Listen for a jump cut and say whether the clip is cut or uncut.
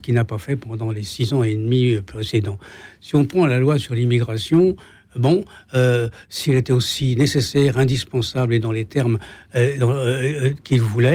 uncut